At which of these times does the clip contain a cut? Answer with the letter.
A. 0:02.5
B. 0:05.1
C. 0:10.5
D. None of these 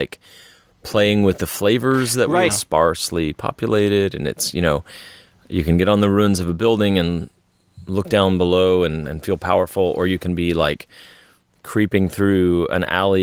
A